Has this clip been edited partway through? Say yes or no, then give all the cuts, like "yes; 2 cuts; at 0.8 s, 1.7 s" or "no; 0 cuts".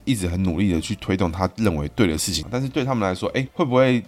yes; 1 cut; at 2.4 s